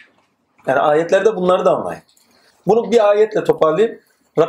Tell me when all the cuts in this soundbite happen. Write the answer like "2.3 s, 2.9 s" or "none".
2.5 s